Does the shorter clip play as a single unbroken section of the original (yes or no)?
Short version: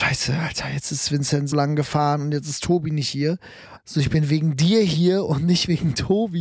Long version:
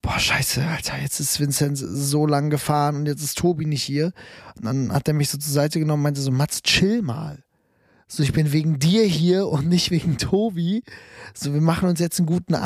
no